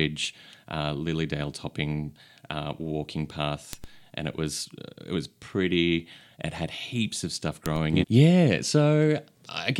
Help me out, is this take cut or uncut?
cut